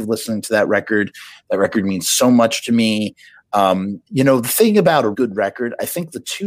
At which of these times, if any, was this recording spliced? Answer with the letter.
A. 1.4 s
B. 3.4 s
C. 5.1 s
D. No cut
C